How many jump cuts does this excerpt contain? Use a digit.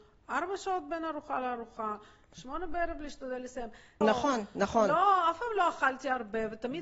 1